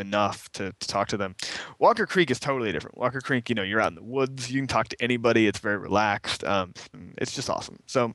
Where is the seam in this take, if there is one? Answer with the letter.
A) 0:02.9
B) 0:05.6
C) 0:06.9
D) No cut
C